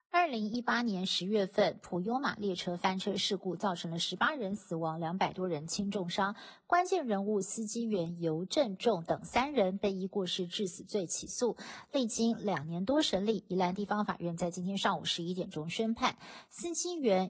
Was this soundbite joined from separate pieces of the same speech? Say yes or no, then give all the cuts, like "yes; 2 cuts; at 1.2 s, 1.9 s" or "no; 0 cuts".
no; 0 cuts